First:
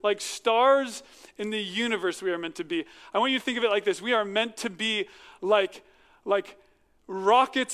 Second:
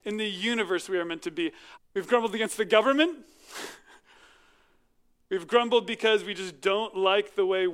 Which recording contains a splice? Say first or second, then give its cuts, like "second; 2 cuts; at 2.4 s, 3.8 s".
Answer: second; 1 cut; at 1.8 s